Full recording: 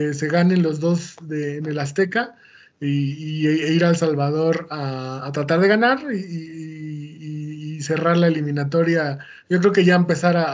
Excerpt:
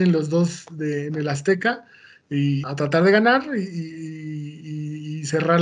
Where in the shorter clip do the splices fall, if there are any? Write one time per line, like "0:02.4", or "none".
0:02.6